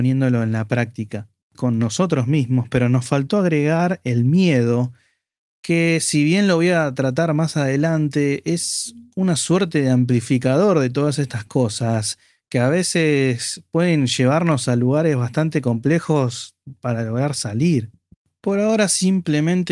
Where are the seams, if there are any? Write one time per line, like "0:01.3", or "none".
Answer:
0:01.5